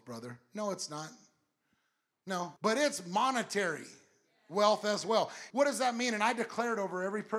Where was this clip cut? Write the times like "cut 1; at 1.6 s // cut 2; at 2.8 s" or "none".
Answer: cut 1; at 2.6 s // cut 2; at 5.5 s